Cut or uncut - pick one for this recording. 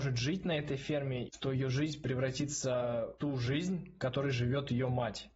cut